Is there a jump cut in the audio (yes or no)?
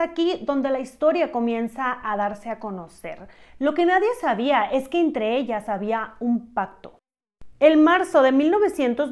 yes